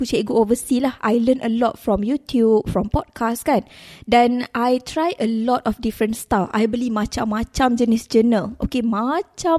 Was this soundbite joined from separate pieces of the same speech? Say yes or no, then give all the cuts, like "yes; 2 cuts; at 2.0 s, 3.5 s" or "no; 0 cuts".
no; 0 cuts